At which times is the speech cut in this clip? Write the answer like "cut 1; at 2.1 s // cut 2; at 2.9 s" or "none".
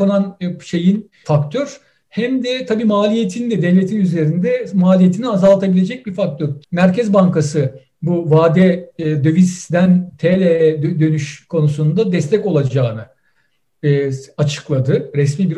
cut 1; at 1.2 s // cut 2; at 6.6 s